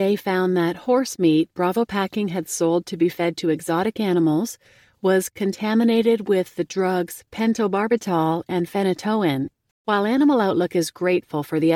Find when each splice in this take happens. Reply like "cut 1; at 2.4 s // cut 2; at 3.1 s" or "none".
cut 1; at 9.7 s